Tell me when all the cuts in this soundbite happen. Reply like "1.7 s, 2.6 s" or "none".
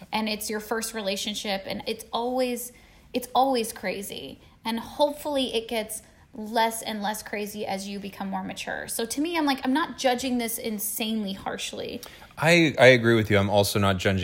none